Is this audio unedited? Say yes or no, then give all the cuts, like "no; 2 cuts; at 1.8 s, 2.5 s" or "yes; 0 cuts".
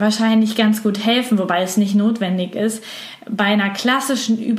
yes; 0 cuts